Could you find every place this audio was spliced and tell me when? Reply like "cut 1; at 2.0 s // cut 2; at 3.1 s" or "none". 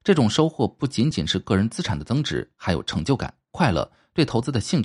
cut 1; at 3.5 s